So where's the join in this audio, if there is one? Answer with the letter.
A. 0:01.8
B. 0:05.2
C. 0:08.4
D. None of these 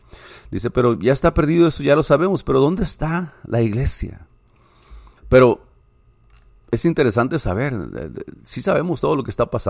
B